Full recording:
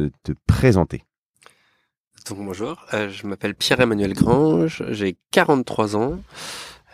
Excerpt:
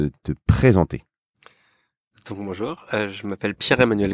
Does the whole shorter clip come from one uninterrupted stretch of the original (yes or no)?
yes